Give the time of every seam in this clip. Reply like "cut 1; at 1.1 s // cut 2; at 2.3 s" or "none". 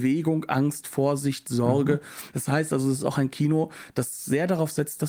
cut 1; at 2.3 s